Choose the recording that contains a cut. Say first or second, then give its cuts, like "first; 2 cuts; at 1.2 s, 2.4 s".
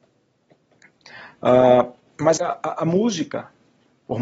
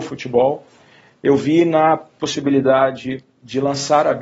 first; 1 cut; at 2.4 s